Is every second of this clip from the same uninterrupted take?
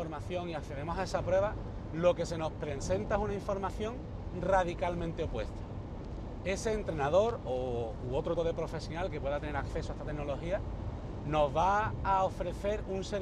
no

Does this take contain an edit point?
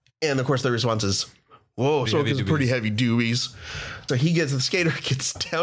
yes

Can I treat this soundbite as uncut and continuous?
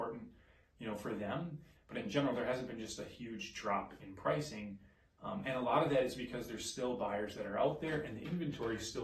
no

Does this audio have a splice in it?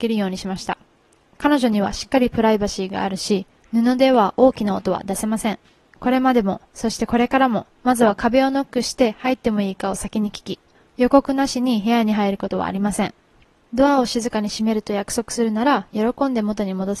no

